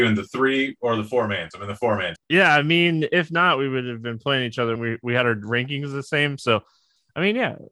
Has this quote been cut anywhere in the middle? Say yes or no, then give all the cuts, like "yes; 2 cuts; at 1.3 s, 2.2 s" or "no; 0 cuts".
yes; 2 cuts; at 2.2 s, 4.7 s